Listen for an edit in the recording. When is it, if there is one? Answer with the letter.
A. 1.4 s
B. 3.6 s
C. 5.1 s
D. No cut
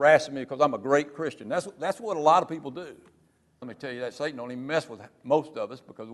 B